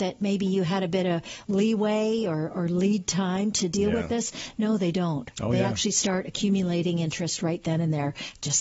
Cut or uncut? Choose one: uncut